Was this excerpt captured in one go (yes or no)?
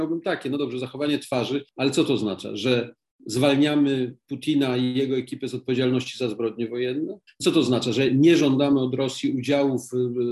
no